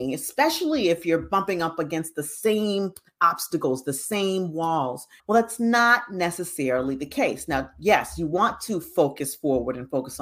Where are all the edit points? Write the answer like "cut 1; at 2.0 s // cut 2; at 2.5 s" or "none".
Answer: cut 1; at 5.2 s